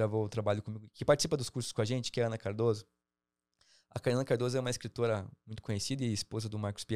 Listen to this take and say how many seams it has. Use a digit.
0